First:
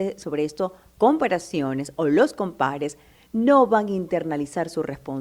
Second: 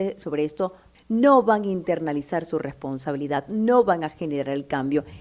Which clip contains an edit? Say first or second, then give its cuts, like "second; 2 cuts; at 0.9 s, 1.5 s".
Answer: second; 1 cut; at 0.9 s